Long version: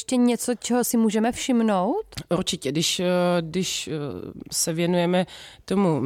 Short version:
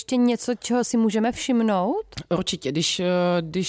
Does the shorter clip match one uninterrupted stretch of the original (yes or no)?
yes